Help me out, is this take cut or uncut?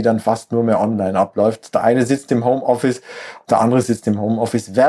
uncut